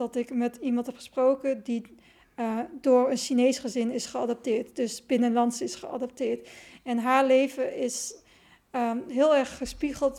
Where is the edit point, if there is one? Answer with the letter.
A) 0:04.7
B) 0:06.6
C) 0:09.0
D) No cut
D